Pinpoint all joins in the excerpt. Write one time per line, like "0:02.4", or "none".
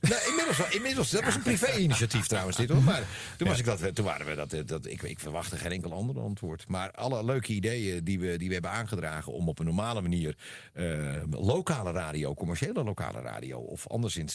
none